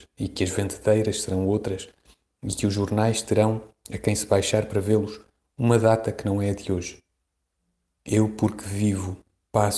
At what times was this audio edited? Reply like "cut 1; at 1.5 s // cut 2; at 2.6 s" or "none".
cut 1; at 8.0 s

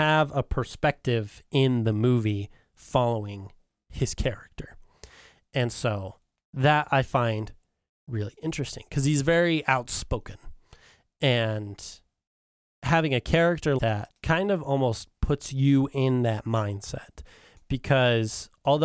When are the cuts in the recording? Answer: cut 1; at 13.8 s

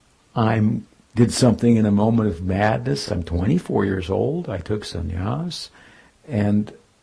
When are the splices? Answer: none

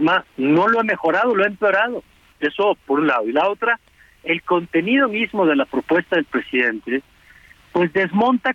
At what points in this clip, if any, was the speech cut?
cut 1; at 2.3 s

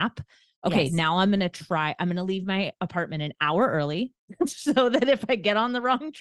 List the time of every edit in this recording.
none

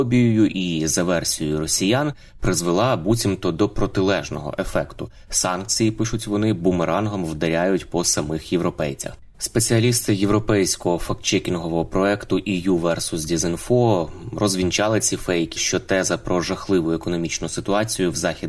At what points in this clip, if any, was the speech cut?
cut 1; at 9.3 s // cut 2; at 15.6 s

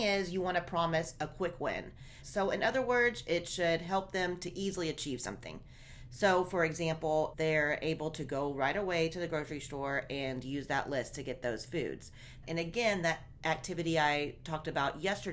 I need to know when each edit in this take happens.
cut 1; at 2.2 s // cut 2; at 7.3 s // cut 3; at 12.4 s

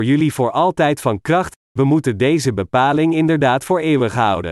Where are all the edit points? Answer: cut 1; at 1.6 s

